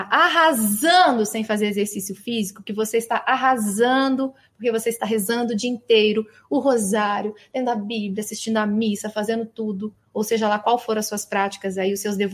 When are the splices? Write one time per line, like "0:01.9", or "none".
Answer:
none